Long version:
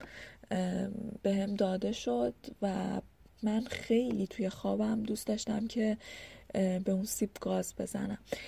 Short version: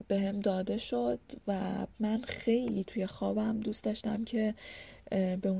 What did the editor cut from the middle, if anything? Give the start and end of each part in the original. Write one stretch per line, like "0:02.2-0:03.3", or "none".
0:03.1-0:03.3